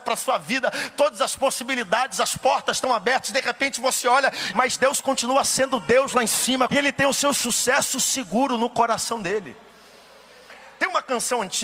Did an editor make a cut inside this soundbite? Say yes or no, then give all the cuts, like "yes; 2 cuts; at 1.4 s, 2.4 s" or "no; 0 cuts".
yes; 2 cuts; at 4.5 s, 6.7 s